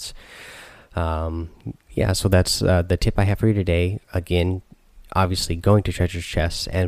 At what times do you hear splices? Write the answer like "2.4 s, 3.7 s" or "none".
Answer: 1.8 s